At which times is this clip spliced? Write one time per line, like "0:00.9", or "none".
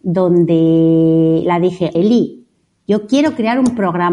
0:01.9